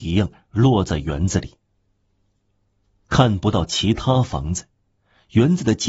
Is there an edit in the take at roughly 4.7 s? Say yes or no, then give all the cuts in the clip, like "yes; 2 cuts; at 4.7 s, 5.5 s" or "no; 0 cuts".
no; 0 cuts